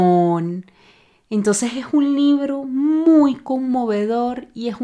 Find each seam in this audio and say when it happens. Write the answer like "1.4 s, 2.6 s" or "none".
none